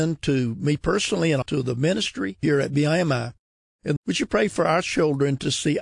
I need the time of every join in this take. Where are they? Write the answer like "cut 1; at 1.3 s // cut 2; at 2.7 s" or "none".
cut 1; at 1.4 s // cut 2; at 4.0 s